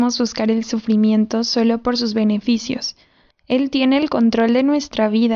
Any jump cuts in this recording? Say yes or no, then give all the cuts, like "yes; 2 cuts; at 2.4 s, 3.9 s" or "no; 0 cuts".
yes; 1 cut; at 3.3 s